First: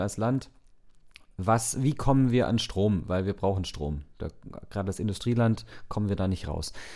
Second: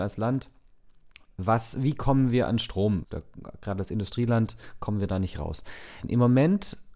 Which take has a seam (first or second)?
second